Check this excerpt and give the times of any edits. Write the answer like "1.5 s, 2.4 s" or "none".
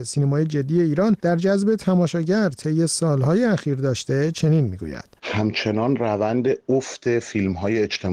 1.2 s